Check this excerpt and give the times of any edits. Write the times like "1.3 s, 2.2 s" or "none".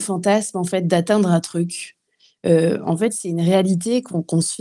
none